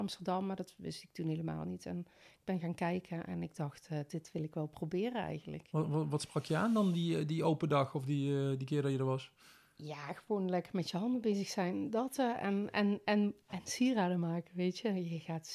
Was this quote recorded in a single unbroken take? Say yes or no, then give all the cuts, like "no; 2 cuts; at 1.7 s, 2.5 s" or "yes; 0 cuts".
yes; 0 cuts